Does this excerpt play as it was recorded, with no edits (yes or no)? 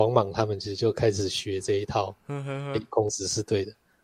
yes